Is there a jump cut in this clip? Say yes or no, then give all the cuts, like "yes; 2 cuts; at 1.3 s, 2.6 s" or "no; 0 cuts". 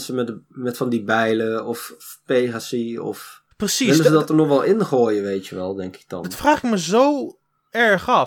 yes; 1 cut; at 3.5 s